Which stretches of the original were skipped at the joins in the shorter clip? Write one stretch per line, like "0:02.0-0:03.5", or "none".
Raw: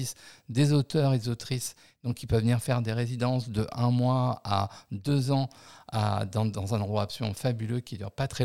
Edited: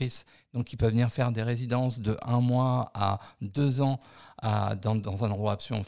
none